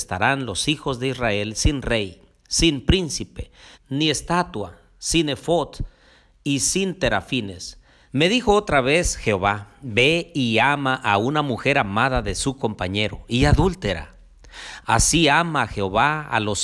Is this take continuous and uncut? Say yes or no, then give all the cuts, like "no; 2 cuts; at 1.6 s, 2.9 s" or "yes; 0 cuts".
no; 2 cuts; at 3.7 s, 8.1 s